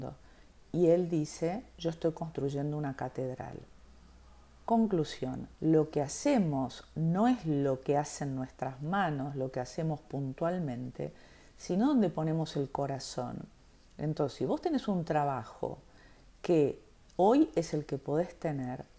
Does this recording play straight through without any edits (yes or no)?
no